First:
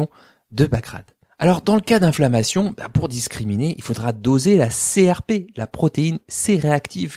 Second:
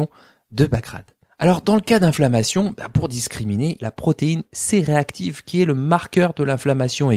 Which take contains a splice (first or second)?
second